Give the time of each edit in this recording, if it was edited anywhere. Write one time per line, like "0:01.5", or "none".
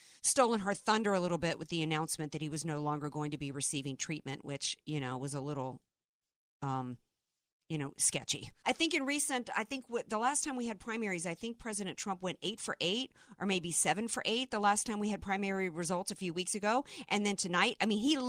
0:08.6